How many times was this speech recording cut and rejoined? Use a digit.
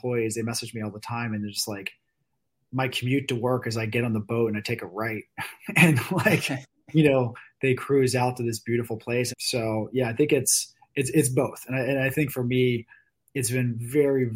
1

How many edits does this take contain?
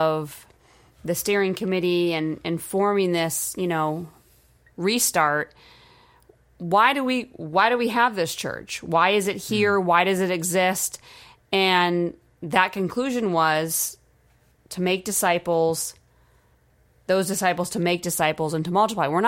0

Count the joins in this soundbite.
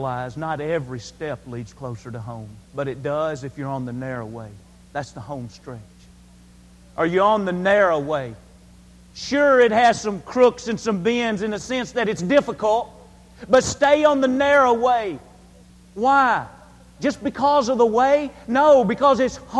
1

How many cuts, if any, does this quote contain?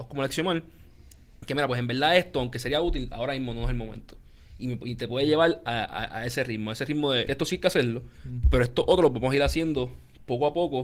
1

